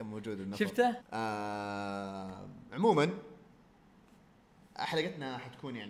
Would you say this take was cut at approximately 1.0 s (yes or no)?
yes